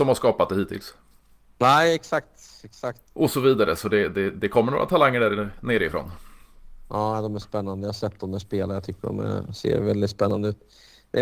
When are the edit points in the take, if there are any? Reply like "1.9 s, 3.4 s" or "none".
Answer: 3.0 s